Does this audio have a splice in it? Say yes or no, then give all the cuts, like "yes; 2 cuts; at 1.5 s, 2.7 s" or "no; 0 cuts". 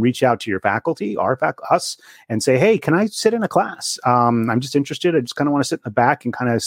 no; 0 cuts